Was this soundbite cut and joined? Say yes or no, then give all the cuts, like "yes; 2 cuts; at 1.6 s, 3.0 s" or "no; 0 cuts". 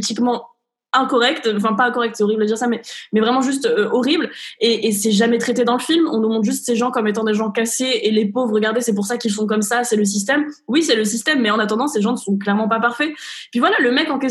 no; 0 cuts